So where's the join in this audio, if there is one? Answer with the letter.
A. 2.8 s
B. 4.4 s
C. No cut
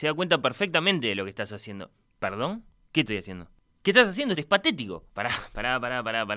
B